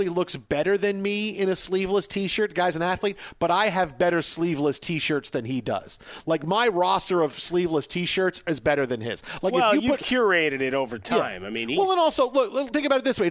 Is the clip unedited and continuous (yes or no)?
yes